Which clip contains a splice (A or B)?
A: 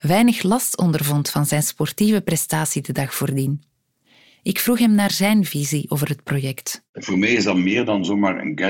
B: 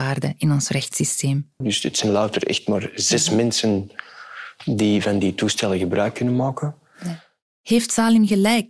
B